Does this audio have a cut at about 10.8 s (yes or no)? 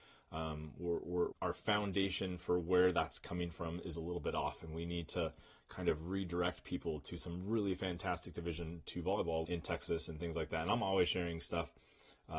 no